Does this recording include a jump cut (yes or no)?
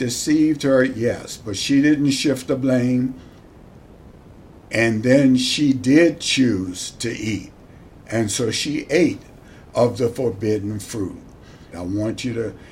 yes